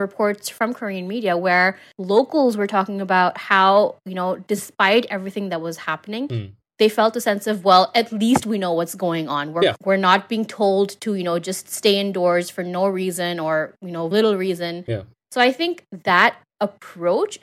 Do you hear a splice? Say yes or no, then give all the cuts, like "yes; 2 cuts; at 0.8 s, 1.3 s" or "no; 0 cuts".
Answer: yes; 2 cuts; at 9.7 s, 14.1 s